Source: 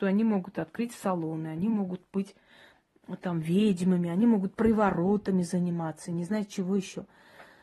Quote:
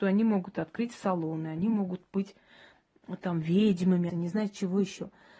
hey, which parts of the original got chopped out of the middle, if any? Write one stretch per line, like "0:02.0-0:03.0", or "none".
0:04.1-0:06.1